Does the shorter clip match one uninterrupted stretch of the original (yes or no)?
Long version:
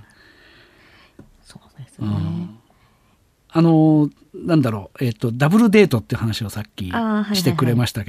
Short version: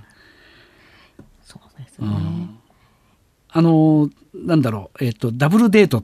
yes